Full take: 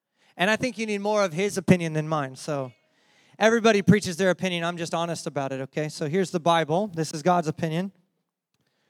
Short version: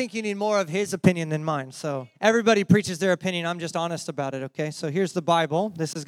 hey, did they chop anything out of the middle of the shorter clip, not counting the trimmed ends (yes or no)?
yes